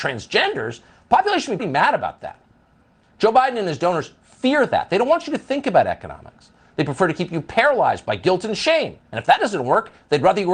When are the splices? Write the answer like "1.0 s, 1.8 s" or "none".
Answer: 1.6 s